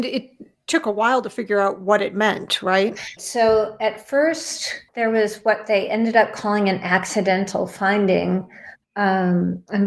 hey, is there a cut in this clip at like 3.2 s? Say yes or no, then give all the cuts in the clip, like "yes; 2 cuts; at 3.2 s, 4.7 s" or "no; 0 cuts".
yes; 3 cuts; at 3.2 s, 4.9 s, 8.8 s